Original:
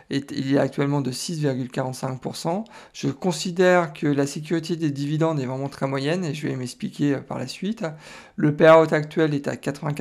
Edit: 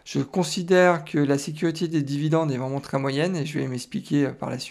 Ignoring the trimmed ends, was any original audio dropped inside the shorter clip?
no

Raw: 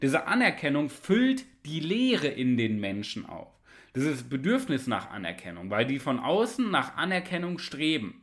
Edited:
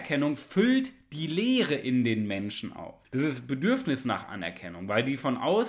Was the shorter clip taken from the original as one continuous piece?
no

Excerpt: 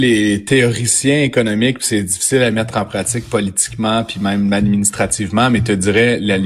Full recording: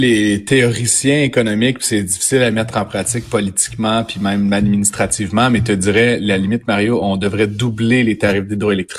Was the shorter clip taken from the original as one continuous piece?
yes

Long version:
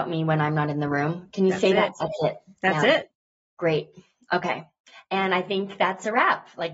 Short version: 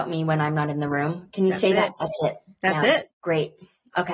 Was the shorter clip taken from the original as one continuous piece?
no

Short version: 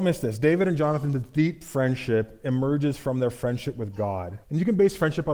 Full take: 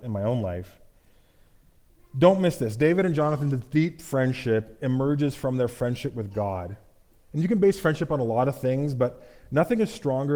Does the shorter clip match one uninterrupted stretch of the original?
no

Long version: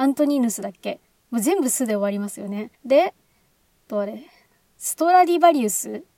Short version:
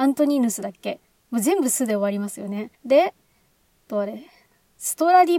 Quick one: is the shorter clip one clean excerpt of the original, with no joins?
yes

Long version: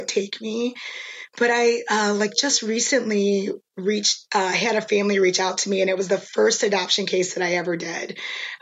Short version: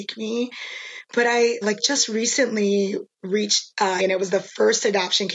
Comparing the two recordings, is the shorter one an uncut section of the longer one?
no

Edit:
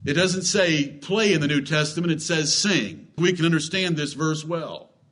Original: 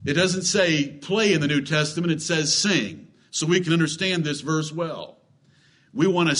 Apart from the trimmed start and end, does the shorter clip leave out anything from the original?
yes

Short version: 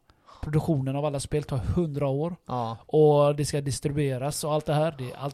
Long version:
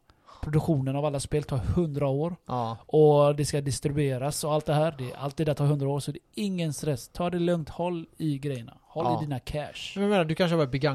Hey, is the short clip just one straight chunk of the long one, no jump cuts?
yes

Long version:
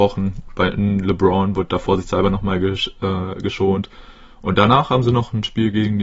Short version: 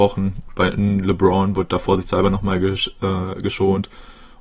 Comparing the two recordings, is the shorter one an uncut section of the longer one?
yes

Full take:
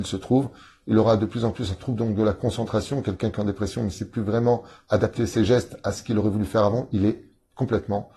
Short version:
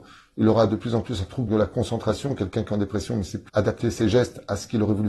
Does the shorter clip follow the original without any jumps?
no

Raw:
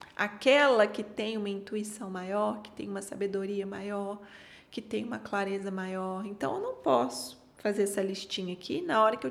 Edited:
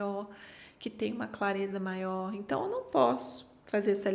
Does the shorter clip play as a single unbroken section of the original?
yes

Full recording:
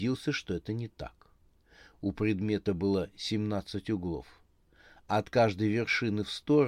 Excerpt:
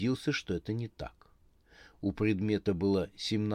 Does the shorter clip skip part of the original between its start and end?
no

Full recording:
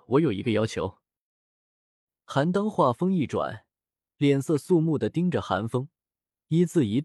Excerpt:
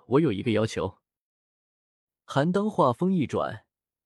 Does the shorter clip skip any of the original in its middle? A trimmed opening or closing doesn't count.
no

